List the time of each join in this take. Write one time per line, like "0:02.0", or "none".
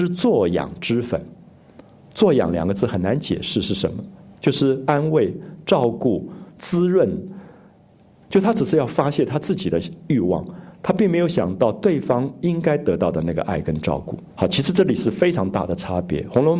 0:08.2
0:14.3